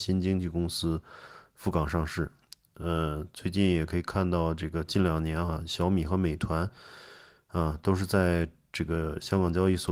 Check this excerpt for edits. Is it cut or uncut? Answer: uncut